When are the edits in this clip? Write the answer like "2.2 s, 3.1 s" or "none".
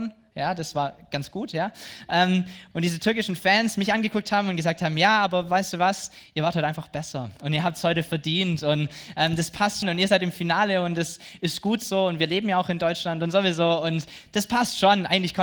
2.7 s, 9.8 s